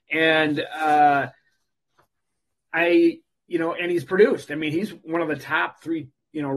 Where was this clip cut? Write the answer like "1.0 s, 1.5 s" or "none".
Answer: none